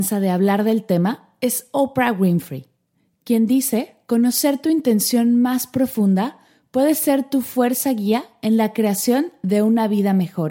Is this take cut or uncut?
uncut